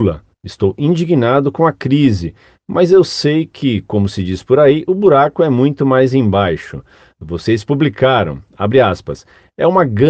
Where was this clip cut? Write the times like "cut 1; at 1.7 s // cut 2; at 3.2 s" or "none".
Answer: none